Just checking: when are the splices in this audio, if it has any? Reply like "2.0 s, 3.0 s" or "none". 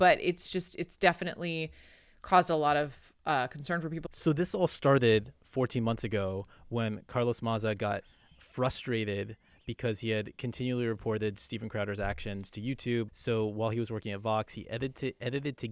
4.1 s, 13.1 s

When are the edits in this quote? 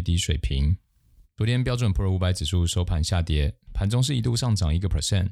none

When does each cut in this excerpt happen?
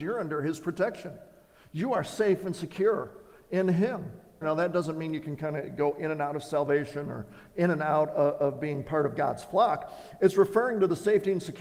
4.4 s

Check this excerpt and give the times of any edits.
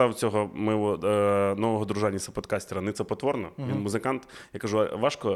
none

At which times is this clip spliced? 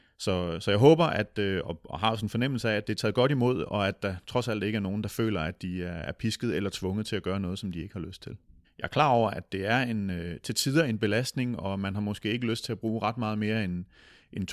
8.6 s

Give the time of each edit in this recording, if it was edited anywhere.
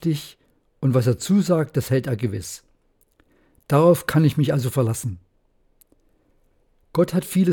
none

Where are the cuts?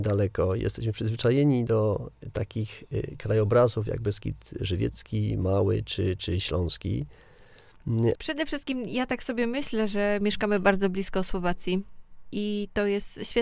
8.2 s

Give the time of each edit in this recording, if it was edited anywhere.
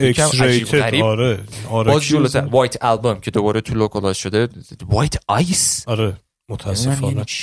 none

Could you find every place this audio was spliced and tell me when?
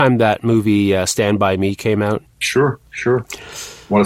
2.2 s

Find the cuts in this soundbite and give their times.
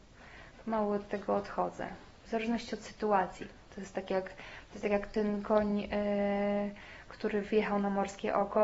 none

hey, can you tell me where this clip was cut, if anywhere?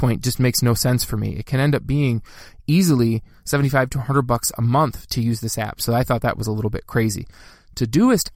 none

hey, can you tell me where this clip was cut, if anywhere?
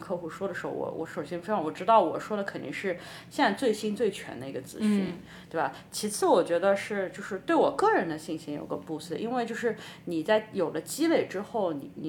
none

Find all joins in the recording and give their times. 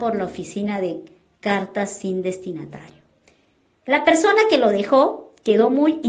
none

